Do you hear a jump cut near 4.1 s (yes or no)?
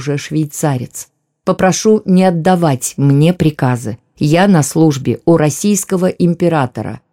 no